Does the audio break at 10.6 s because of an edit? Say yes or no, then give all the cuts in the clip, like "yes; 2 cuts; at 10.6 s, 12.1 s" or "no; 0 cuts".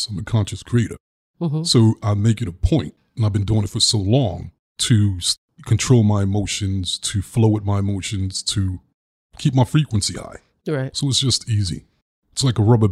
no; 0 cuts